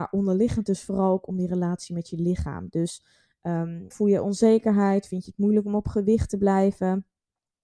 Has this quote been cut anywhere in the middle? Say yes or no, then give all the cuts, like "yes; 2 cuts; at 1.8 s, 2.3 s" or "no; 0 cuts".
yes; 1 cut; at 3.9 s